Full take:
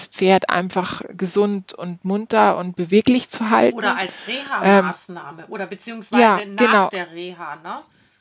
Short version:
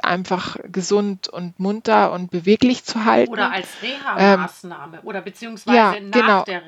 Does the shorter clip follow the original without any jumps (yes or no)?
yes